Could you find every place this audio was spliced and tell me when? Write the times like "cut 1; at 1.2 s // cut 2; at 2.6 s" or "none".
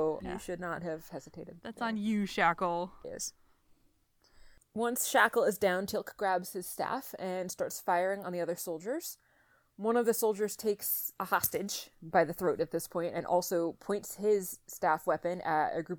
cut 1; at 3.0 s